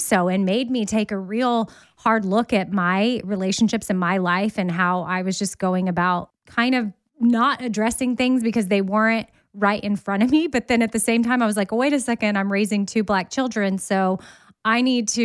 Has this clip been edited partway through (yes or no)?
no